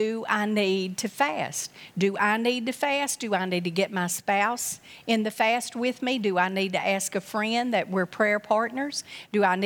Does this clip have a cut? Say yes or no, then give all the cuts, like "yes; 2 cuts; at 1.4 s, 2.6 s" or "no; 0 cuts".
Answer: no; 0 cuts